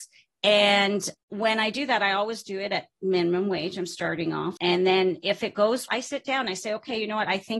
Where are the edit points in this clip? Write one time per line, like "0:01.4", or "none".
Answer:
0:04.6
0:05.9